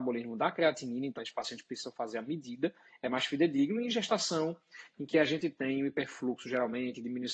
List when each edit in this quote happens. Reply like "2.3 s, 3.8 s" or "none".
1.2 s